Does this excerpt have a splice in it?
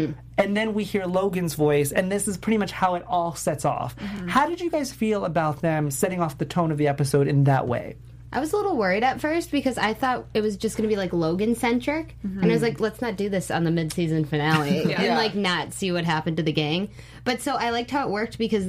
no; 0 cuts

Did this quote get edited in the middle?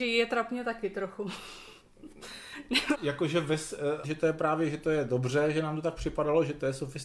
yes; 2 cuts; at 2.9 s, 4.0 s

